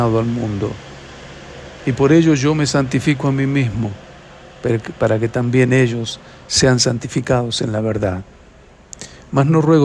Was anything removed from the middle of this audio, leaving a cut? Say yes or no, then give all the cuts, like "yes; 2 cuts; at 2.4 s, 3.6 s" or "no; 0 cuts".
no; 0 cuts